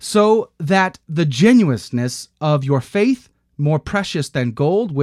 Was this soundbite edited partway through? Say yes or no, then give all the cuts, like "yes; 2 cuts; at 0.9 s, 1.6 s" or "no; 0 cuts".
no; 0 cuts